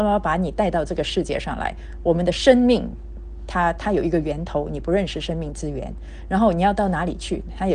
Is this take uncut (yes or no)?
yes